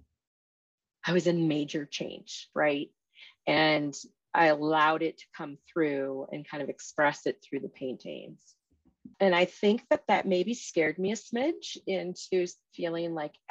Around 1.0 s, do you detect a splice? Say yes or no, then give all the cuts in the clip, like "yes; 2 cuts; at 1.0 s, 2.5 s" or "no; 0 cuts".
no; 2 cuts; at 2.5 s, 9.1 s